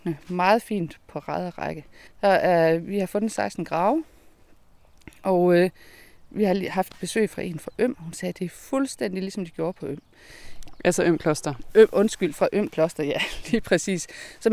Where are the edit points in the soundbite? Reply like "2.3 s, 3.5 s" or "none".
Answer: 2.1 s